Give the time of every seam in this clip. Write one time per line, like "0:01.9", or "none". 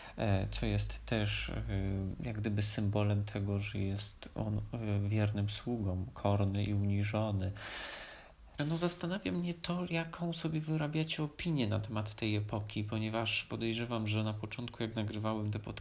0:08.6